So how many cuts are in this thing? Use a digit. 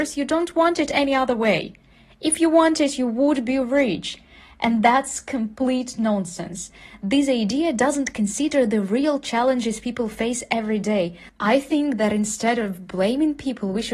1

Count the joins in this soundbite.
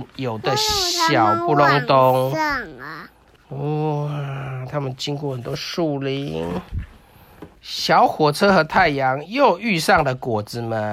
2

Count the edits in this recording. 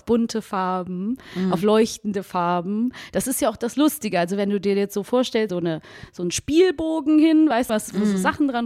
2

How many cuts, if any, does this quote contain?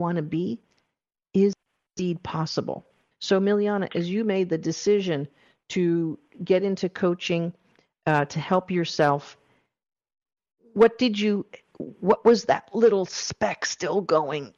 1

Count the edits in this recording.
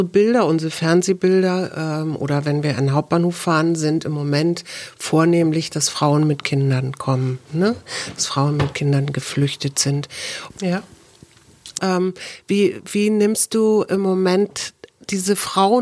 2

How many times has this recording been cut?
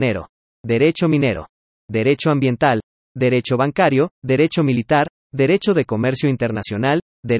1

